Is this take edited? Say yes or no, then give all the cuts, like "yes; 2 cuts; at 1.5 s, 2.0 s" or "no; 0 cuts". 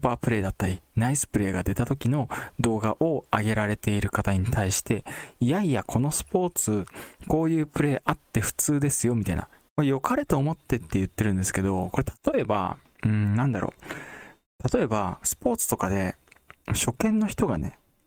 yes; 1 cut; at 9.7 s